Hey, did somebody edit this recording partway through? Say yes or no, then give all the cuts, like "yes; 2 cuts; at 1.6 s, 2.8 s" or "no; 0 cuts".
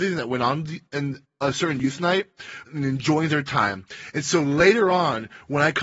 yes; 1 cut; at 2.6 s